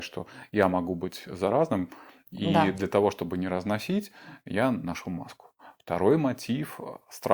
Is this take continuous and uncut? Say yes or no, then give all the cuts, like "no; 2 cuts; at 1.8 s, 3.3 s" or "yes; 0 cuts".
yes; 0 cuts